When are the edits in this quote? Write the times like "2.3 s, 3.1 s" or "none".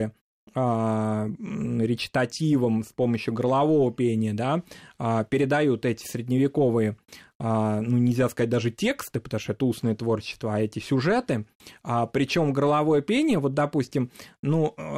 none